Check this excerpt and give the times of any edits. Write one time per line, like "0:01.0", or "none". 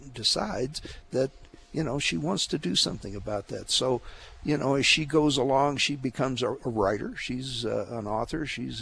0:06.6